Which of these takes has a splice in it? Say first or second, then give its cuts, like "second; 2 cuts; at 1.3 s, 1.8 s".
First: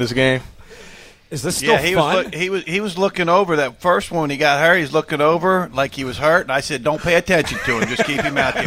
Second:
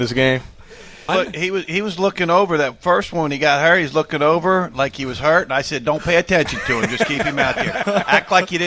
second; 1 cut; at 1.1 s